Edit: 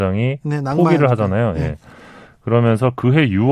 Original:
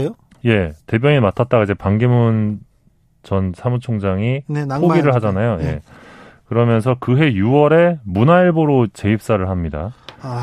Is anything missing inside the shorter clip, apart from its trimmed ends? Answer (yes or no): no